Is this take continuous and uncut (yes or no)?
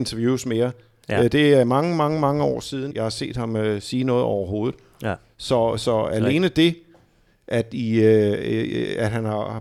no